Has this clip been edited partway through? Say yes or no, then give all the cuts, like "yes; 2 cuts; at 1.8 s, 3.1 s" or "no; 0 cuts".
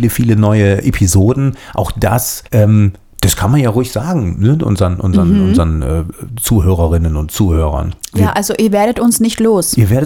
yes; 1 cut; at 2.5 s